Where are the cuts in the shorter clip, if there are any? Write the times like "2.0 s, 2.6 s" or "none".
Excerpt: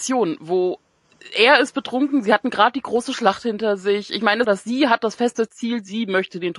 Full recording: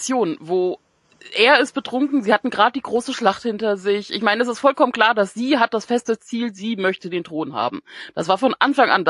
4.4 s

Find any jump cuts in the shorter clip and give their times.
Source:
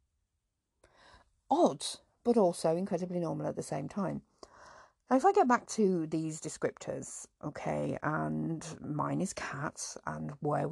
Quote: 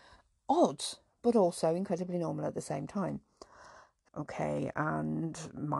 4.1 s

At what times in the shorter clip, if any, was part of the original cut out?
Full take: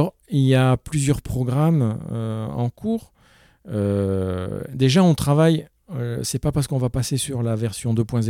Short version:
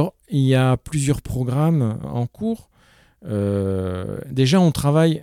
2.0 s

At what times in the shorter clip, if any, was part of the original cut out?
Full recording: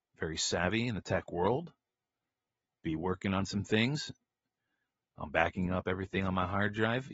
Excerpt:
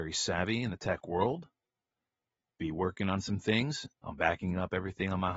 3.9 s

